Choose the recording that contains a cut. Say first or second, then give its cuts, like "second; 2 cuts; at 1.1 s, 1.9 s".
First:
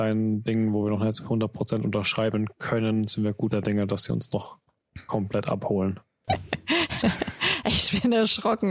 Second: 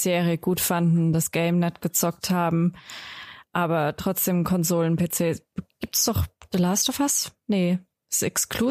first; 1 cut; at 6.3 s